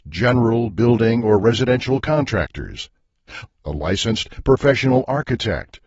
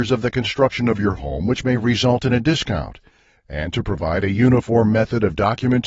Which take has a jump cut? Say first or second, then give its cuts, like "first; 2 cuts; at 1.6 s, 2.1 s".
first; 1 cut; at 3.5 s